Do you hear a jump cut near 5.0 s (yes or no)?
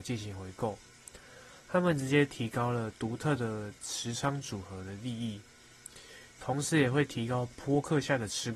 no